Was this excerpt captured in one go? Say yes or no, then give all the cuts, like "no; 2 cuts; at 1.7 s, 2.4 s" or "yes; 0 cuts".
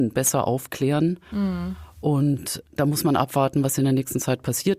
yes; 0 cuts